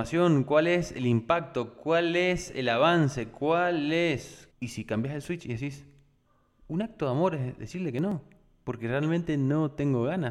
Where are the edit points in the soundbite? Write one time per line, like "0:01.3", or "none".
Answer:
0:04.5